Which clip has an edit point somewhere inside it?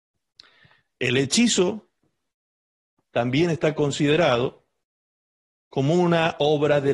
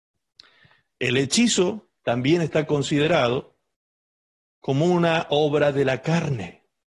second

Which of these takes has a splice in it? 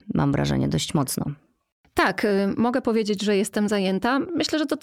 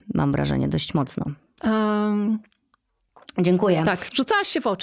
second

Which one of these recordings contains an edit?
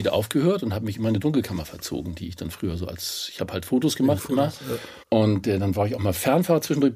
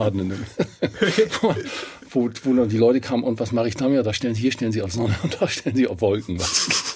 first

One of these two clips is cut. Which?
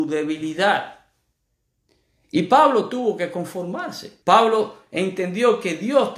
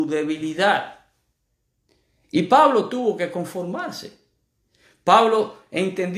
first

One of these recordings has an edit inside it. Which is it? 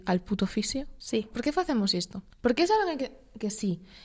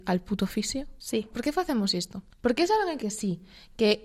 second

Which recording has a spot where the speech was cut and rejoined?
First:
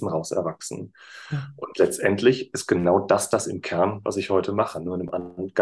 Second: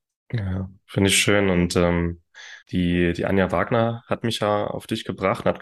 second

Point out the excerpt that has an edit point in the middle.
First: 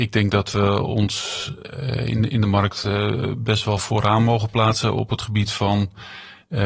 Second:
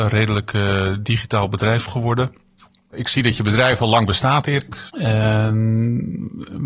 second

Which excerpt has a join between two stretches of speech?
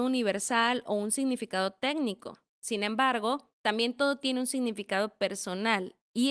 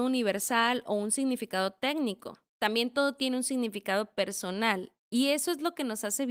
second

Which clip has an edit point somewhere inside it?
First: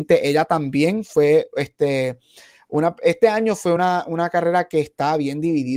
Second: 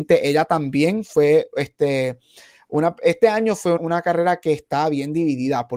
second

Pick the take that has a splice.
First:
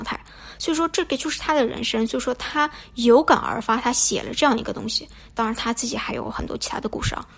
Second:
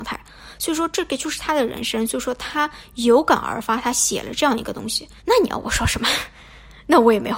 second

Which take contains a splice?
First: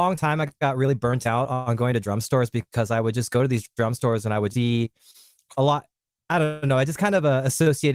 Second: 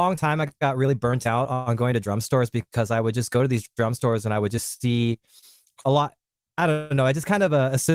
first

